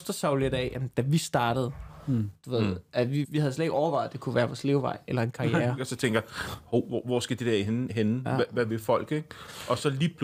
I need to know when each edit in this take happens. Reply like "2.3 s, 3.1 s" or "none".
3.2 s, 5.8 s